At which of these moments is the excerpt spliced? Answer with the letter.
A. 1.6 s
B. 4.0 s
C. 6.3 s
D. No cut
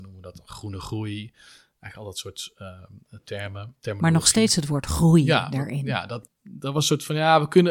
C